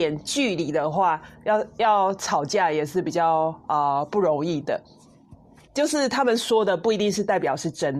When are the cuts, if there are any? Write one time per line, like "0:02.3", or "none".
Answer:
0:05.6